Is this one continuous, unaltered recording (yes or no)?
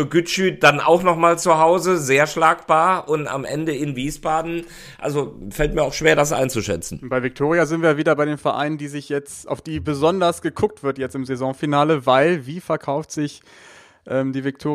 yes